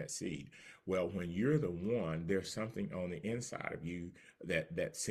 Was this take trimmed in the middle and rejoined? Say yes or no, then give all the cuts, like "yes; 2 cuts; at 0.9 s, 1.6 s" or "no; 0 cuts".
no; 0 cuts